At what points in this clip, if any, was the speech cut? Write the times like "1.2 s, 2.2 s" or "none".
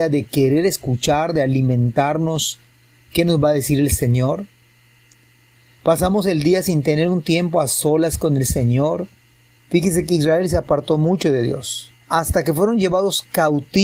9.6 s, 12.0 s